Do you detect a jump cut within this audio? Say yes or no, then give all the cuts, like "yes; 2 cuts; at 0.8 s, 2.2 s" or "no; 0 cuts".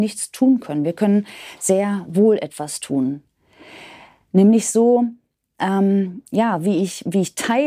no; 0 cuts